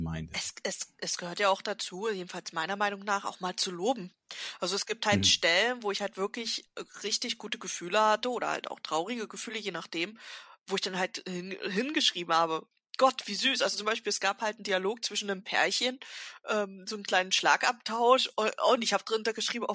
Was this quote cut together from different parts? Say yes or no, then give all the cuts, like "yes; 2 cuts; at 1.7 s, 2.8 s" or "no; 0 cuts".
no; 0 cuts